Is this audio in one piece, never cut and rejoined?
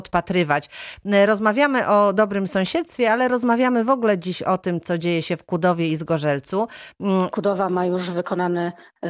no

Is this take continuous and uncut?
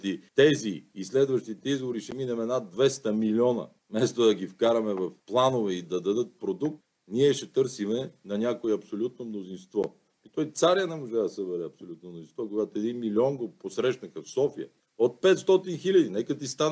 no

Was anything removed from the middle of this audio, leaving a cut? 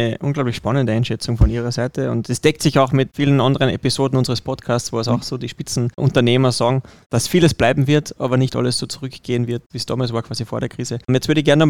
no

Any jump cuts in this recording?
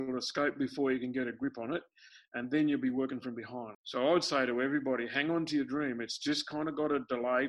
yes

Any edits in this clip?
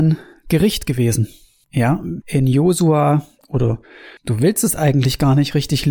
yes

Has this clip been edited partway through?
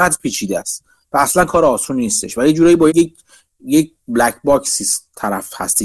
yes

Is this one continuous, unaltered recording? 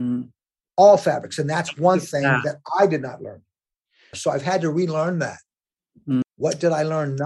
no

